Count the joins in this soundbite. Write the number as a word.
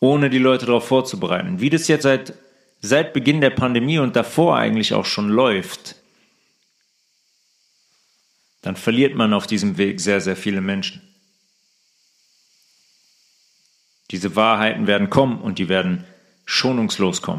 one